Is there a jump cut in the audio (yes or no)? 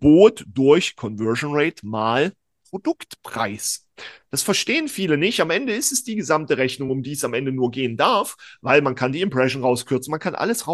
no